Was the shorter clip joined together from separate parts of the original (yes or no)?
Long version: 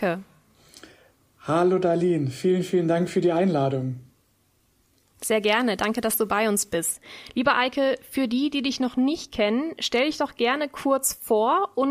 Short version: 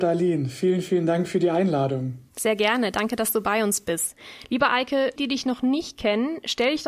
yes